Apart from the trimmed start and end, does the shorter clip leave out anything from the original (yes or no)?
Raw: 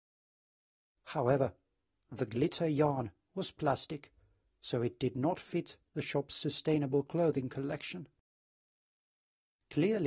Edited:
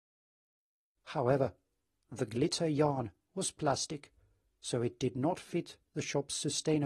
no